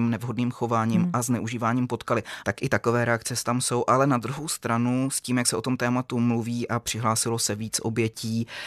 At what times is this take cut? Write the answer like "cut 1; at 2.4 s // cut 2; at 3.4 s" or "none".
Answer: cut 1; at 2.4 s

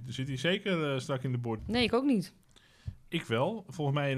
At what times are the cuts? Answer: cut 1; at 1.6 s

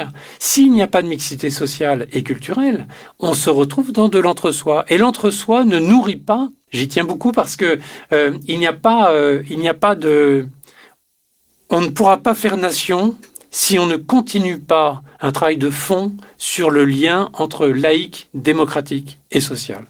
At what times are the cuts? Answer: cut 1; at 6.7 s

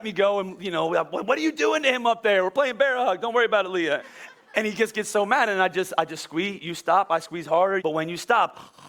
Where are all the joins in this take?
cut 1; at 4.0 s // cut 2; at 7.8 s

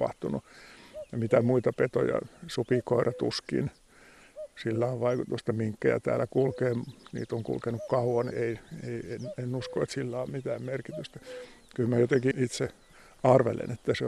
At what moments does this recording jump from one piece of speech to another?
cut 1; at 8.3 s // cut 2; at 12.3 s

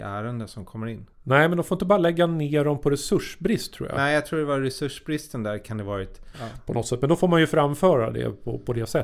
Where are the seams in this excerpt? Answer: cut 1; at 1.1 s // cut 2; at 6.3 s

